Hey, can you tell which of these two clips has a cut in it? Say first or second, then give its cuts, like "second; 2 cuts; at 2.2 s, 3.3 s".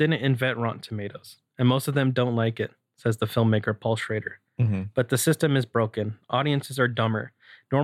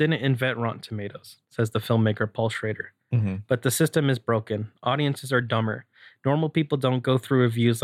second; 1 cut; at 1.4 s